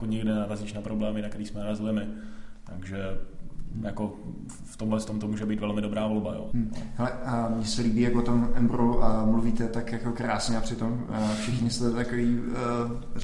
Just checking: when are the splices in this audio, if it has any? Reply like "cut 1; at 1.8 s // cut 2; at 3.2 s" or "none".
cut 1; at 6.5 s